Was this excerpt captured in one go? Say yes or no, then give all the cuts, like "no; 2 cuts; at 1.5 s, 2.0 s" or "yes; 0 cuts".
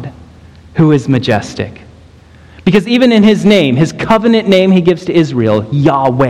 yes; 0 cuts